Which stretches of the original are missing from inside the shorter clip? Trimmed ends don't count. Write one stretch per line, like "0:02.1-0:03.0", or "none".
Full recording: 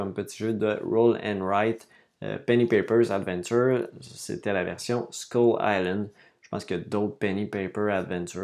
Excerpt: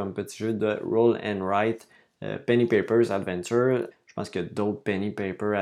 0:03.9-0:06.3